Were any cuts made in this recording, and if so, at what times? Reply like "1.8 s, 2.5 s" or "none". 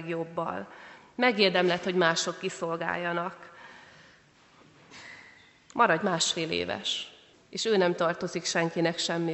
7.3 s